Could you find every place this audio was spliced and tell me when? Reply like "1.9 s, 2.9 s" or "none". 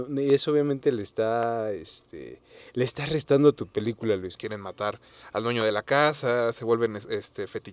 4.4 s